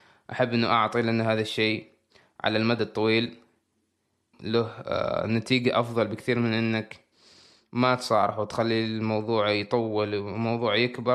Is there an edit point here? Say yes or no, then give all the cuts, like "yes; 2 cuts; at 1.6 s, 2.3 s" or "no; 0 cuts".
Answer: yes; 1 cut; at 4.3 s